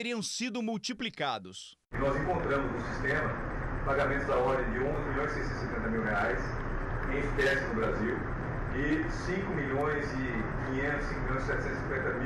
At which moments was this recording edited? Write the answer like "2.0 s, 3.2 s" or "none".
none